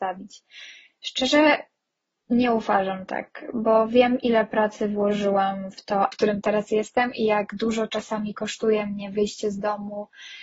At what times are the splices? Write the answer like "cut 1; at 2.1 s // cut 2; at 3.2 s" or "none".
cut 1; at 1.0 s // cut 2; at 6.1 s